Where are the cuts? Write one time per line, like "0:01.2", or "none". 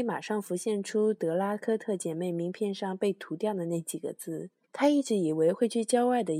0:04.6